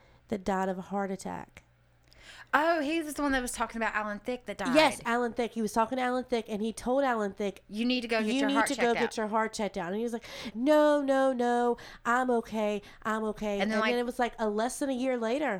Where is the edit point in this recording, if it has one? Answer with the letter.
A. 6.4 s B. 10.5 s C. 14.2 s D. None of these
B